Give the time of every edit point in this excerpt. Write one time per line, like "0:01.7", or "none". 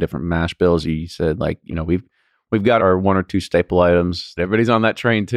0:02.8
0:04.4